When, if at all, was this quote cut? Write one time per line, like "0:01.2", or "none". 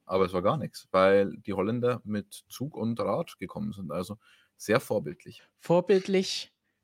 none